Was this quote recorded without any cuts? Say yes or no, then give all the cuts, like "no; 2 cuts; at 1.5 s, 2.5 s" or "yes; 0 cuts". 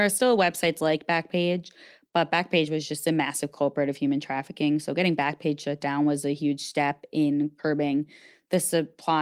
yes; 0 cuts